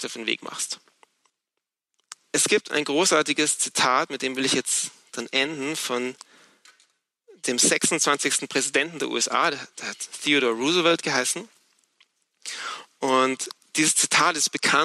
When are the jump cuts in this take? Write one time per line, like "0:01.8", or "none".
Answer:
none

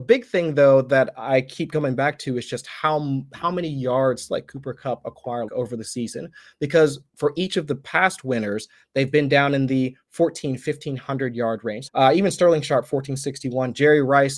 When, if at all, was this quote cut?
0:05.5
0:07.1
0:11.9

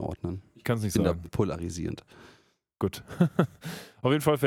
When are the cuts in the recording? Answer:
0:01.3

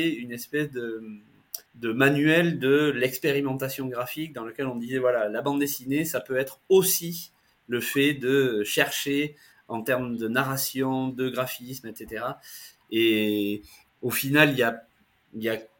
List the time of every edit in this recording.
0:01.7
0:13.9

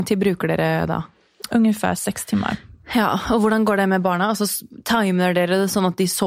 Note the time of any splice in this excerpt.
none

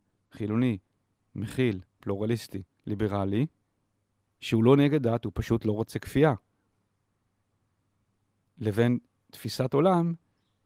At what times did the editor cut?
none

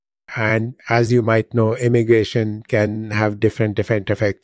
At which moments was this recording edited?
none

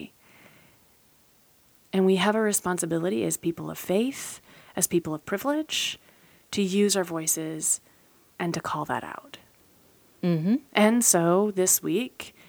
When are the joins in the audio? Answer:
none

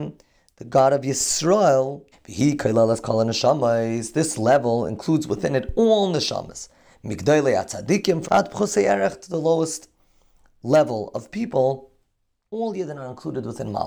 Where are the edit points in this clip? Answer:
0:02.1
0:08.2
0:12.5

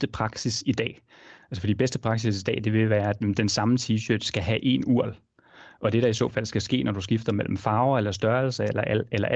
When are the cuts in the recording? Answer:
none

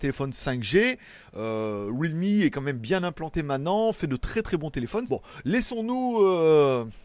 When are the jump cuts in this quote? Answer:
0:05.1

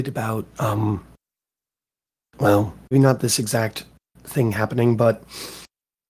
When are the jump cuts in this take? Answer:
0:02.9

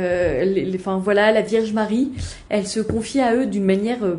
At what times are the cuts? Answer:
0:02.5

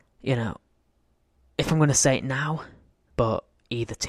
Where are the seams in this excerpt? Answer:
0:03.1

